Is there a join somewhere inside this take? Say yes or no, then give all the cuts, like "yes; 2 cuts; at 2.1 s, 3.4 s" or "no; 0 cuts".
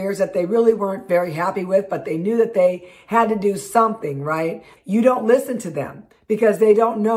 yes; 1 cut; at 4.8 s